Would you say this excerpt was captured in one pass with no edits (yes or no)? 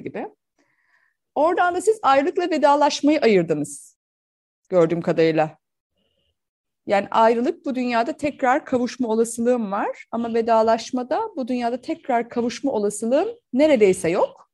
yes